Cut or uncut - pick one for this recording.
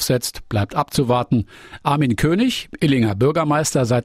cut